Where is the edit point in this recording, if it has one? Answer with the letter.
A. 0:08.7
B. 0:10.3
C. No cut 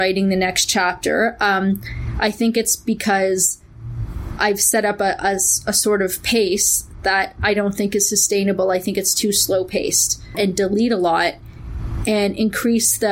B